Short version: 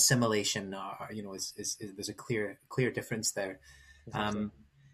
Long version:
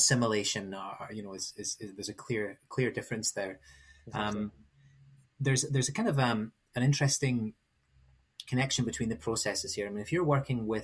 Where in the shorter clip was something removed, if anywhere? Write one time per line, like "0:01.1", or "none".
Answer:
none